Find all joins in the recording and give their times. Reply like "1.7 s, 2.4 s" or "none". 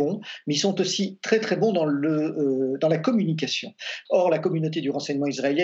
4.1 s